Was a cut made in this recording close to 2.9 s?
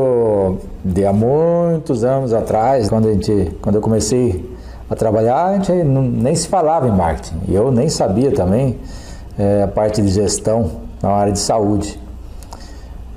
yes; 1 cut; at 2.9 s

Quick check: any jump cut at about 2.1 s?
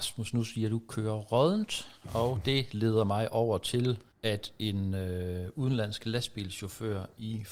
no; 1 cut; at 4.1 s

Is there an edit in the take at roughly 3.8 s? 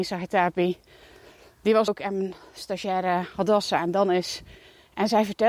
no; 1 cut; at 1.9 s

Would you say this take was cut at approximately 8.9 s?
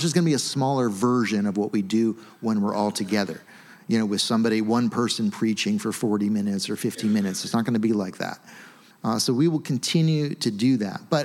yes; 1 cut; at 8.9 s

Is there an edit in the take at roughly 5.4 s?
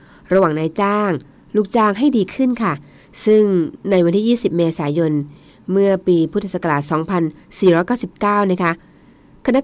no; 0 cuts

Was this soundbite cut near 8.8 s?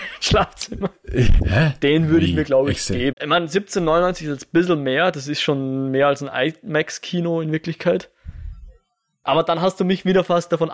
no; 2 cuts; at 1.4 s, 3.1 s

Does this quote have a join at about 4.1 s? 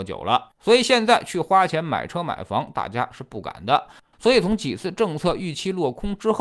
yes; 1 cut; at 4.1 s

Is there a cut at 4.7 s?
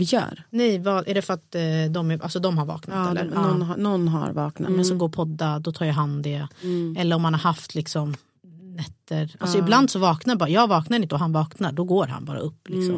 yes; 1 cut; at 4.7 s

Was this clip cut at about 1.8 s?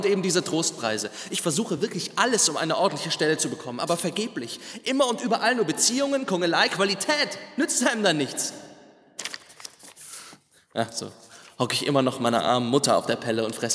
no; 0 cuts

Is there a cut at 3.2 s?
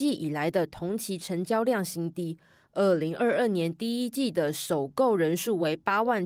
no; 0 cuts

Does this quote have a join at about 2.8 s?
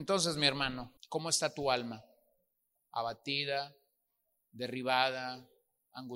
yes; 2 cuts; at 1.0 s, 2.8 s

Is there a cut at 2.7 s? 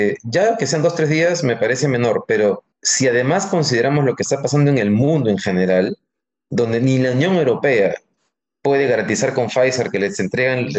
yes; 1 cut; at 2.7 s

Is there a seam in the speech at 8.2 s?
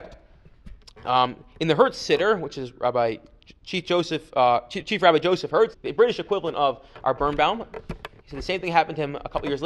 yes; 2 cuts; at 5.7 s, 8.2 s

